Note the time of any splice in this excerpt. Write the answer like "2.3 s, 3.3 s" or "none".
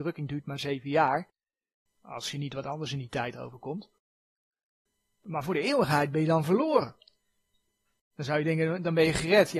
1.9 s, 8.1 s